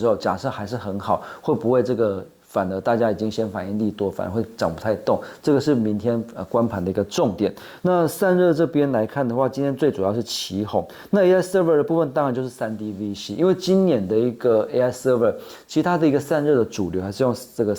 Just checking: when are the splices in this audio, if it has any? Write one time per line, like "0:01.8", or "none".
0:07.8
0:11.1